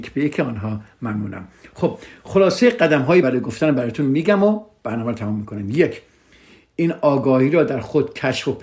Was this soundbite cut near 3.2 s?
yes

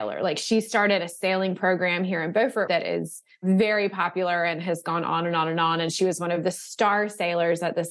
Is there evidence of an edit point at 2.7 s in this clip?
yes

